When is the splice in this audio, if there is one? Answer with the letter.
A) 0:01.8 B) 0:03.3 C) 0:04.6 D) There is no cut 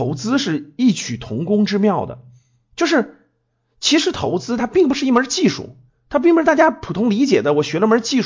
C